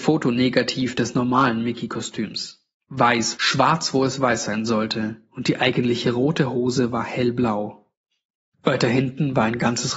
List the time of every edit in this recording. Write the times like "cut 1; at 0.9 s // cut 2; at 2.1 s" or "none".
cut 1; at 3.4 s // cut 2; at 8.5 s